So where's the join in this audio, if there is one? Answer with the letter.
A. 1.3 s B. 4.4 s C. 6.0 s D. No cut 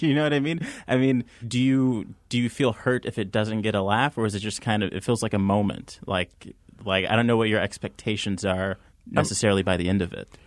D